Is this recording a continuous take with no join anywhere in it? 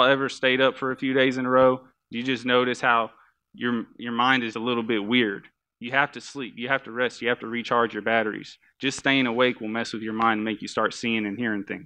no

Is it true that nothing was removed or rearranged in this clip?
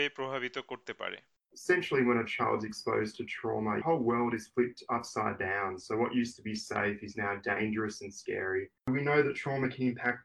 yes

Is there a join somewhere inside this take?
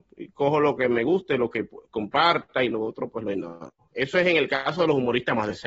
no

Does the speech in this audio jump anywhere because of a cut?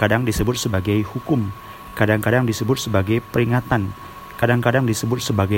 no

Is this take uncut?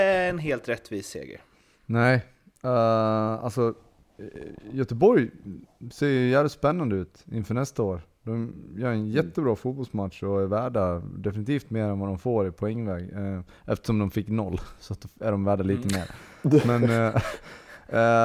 yes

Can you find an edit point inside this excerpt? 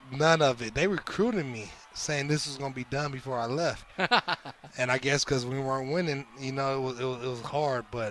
no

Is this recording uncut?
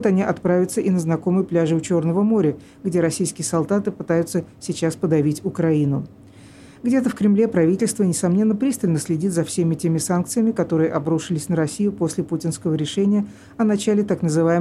yes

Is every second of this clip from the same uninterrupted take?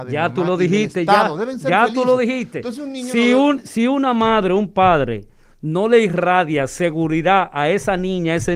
yes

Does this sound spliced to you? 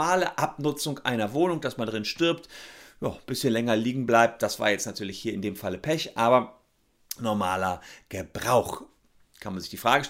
no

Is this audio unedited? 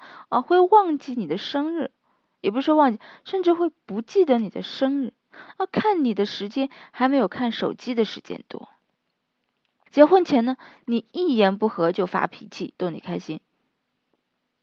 no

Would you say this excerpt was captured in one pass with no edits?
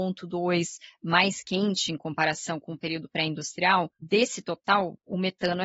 yes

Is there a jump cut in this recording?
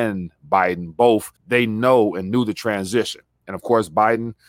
yes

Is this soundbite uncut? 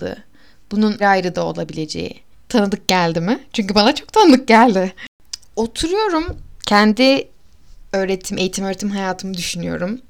no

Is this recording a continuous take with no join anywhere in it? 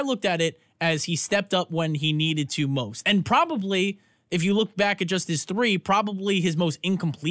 yes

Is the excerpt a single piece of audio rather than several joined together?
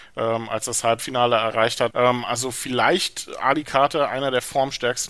no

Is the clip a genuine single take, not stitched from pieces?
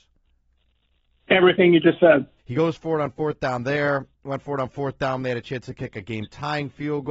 no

